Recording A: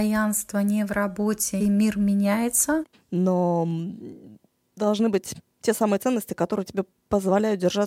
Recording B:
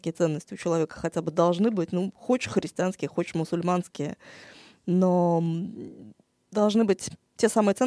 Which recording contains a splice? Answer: A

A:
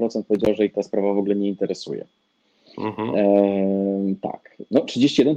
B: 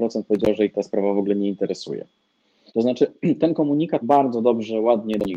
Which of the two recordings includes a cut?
B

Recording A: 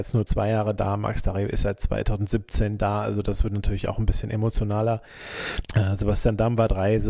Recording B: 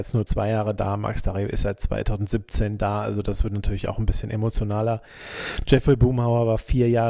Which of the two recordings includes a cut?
A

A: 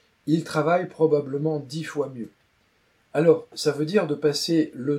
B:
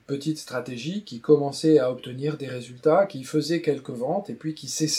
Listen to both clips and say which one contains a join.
A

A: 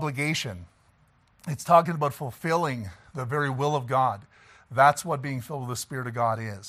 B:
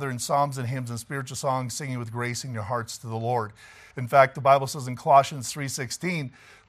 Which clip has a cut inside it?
B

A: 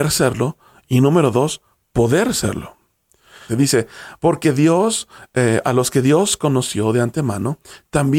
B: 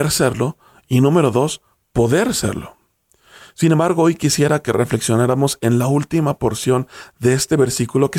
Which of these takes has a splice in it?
A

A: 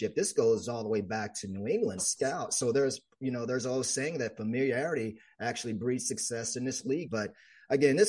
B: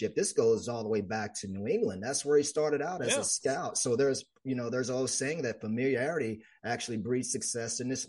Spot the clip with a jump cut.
A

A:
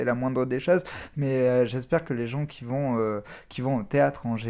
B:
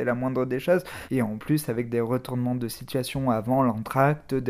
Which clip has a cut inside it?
B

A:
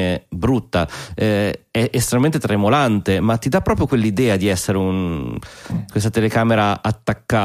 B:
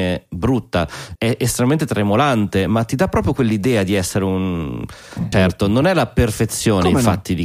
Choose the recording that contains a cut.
B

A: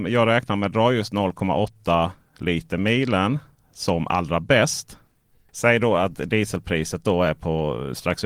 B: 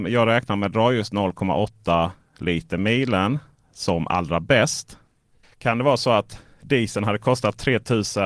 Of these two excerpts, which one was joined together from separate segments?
B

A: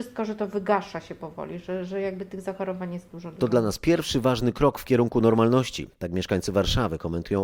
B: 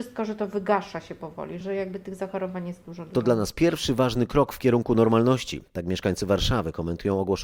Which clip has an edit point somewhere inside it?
B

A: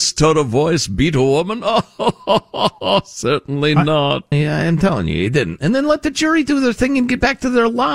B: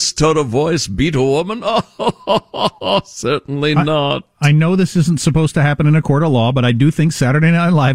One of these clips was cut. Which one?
A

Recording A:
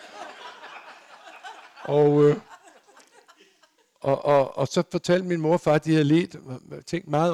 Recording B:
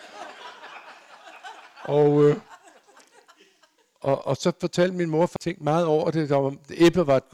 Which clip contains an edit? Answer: B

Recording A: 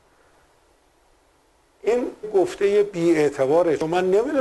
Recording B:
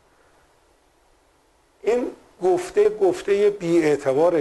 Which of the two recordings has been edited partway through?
A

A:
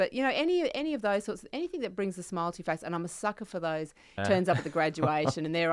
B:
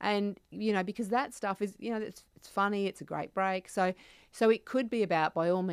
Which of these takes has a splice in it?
A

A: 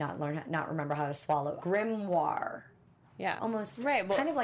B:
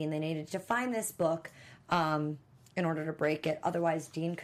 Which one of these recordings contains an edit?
A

